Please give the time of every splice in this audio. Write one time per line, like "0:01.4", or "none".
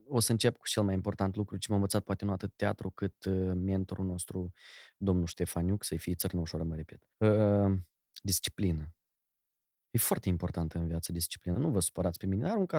0:07.1
0:11.5